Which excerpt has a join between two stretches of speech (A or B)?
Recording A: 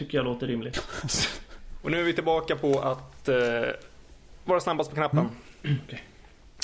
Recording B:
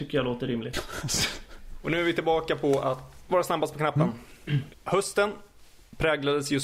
B